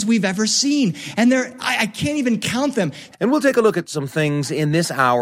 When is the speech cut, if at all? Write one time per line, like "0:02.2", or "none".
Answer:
0:03.1

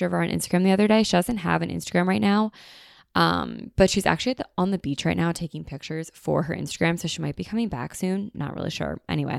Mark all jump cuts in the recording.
none

